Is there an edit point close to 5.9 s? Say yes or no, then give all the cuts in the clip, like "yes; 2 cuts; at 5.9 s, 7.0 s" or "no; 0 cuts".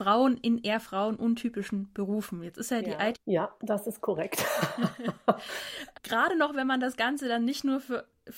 yes; 2 cuts; at 3.1 s, 5.9 s